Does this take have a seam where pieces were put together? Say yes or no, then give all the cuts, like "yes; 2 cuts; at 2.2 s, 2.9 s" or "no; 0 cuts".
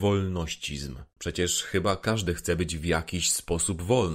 yes; 1 cut; at 1.2 s